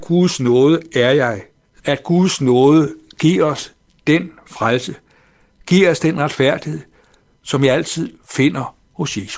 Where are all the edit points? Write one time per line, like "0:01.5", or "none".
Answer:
0:01.8
0:05.6